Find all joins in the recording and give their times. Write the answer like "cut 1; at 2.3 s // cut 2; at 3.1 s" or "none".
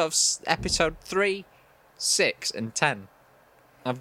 none